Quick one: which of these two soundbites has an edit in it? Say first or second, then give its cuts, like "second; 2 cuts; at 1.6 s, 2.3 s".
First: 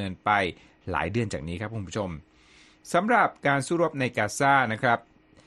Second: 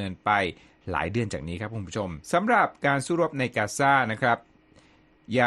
second; 1 cut; at 2.2 s